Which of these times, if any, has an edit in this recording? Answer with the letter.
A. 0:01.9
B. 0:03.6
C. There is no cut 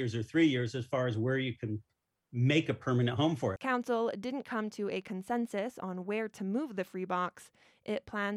B